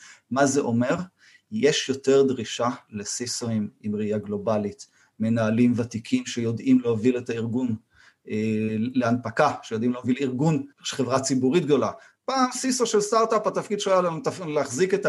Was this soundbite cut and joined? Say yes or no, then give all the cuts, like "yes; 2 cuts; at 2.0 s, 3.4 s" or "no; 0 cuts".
yes; 1 cut; at 10.7 s